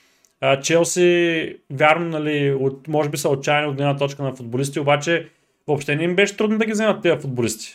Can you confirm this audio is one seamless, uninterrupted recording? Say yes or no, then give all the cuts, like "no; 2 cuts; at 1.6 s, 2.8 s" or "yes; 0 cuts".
yes; 0 cuts